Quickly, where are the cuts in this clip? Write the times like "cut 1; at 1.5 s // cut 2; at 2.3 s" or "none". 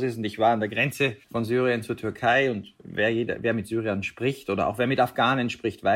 cut 1; at 1.2 s